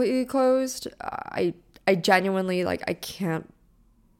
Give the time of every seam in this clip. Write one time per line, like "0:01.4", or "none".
none